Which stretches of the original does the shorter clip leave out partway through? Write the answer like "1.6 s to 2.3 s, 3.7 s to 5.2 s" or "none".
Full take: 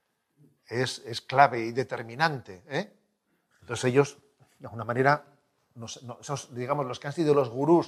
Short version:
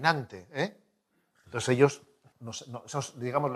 4.5 s to 5.7 s